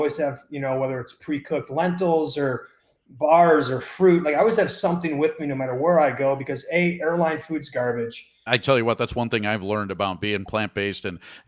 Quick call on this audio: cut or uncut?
cut